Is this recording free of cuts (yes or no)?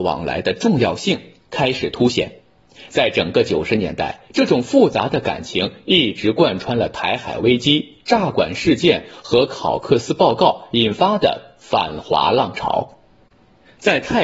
no